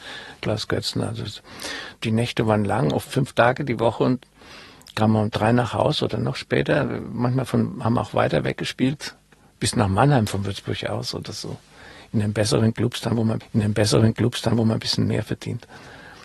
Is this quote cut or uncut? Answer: uncut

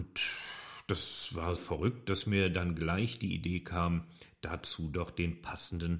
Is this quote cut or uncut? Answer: cut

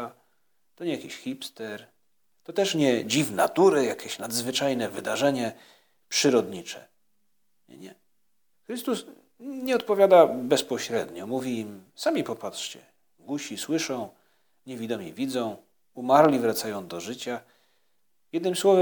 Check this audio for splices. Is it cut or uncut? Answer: cut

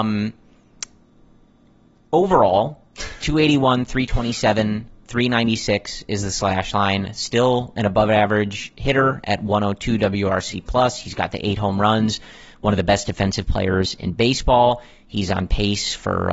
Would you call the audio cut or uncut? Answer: uncut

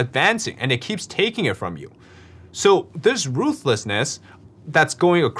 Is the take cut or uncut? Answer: uncut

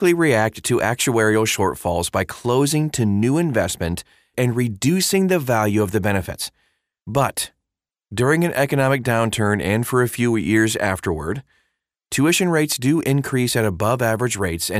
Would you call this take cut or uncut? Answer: cut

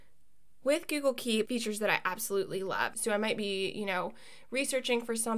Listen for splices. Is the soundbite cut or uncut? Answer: cut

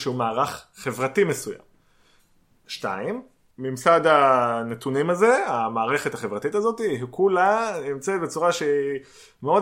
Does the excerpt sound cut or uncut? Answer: uncut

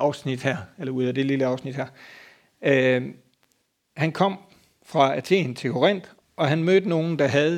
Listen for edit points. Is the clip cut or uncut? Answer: cut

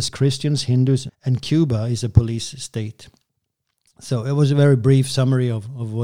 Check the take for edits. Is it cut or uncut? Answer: cut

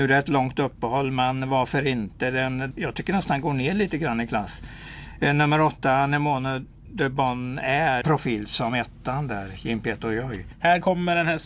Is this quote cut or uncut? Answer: cut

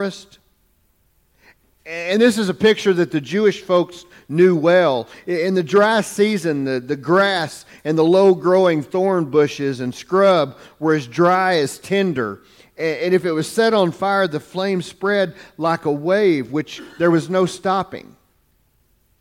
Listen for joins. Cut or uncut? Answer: uncut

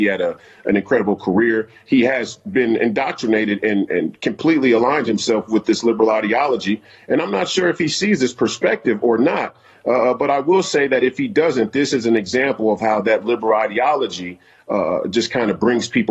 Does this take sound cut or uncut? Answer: uncut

